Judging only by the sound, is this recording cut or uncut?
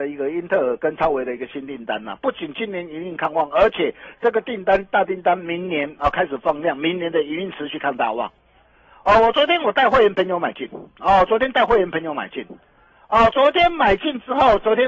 uncut